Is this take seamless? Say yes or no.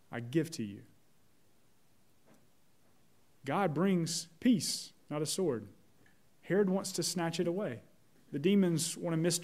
no